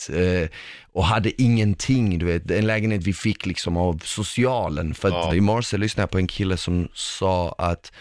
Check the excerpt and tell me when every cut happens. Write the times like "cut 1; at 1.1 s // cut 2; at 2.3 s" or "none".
cut 1; at 5.3 s